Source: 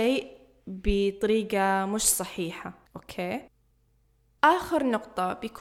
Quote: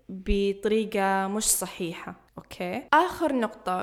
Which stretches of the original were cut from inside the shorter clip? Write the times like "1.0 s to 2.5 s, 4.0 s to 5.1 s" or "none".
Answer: 3.5 s to 4.4 s